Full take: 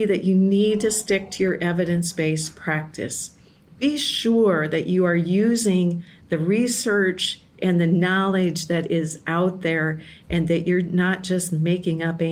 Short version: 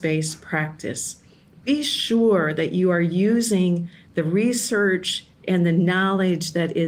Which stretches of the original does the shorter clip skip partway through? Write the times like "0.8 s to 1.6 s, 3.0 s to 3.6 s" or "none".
none